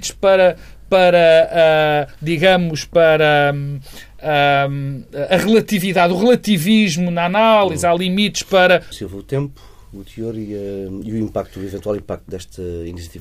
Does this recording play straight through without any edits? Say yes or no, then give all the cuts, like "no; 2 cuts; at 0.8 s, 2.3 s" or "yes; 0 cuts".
no; 1 cut; at 8.9 s